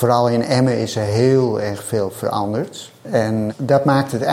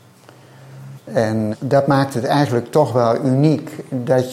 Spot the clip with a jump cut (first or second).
second